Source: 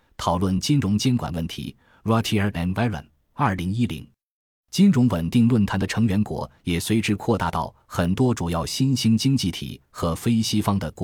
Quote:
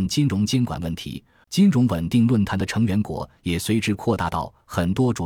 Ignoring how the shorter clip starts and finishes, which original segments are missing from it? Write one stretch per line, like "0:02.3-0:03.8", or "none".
0:02.0-0:04.6